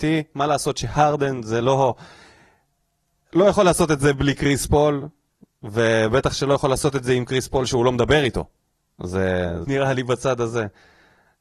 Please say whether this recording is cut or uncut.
cut